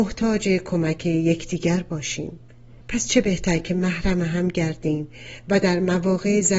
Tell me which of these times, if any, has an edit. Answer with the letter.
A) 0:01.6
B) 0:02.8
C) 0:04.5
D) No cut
B